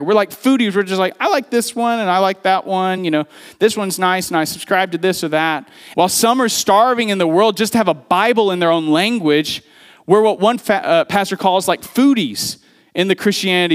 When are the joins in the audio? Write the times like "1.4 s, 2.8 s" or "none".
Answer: 3.0 s, 5.9 s